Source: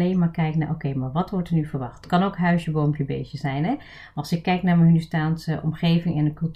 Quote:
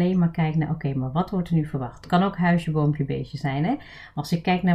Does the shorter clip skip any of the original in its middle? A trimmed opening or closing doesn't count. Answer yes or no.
no